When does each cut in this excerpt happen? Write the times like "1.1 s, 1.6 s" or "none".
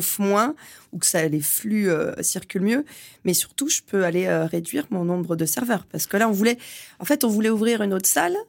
none